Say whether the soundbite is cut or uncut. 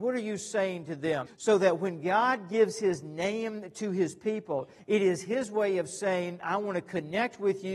cut